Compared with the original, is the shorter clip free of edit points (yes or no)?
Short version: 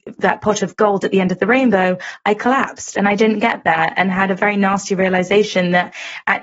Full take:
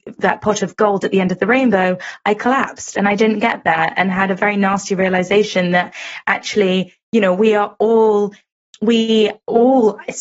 yes